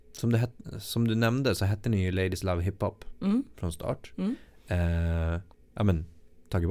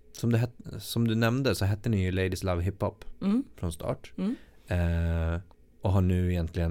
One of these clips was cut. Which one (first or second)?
first